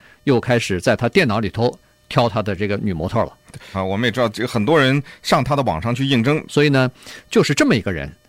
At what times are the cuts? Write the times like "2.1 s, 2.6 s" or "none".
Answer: 3.7 s, 6.5 s

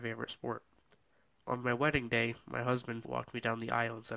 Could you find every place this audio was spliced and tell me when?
3.0 s

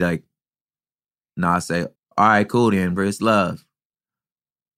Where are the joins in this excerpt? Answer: 1.9 s, 3.0 s

